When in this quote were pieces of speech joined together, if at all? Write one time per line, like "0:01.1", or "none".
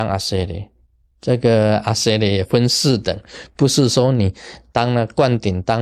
0:01.1